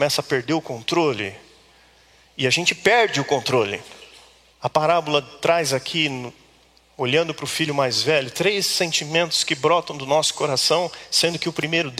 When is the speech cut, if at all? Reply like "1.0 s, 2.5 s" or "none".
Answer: 4.5 s

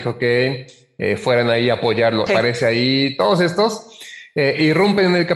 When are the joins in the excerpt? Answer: 2.3 s

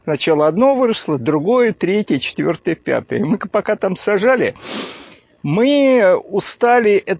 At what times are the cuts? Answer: none

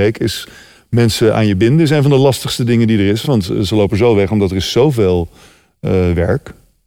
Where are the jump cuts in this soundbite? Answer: none

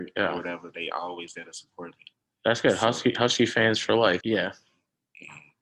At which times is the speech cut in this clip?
4.2 s

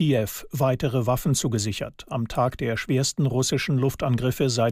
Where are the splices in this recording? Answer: none

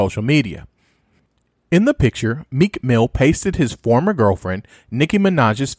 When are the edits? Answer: none

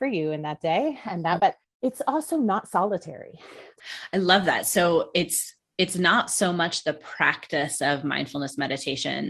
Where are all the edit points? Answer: 1.4 s, 3.8 s

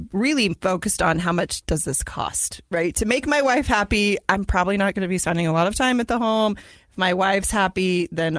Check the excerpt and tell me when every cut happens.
none

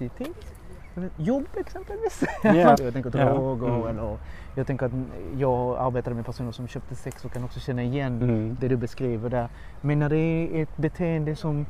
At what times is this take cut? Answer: 2.7 s

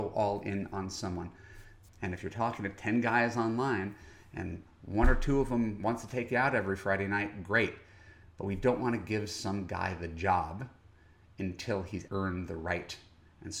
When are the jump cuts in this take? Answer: 1.9 s, 12.1 s

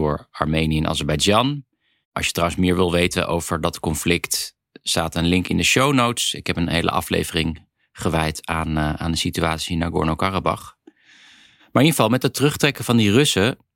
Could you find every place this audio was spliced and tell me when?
2.0 s

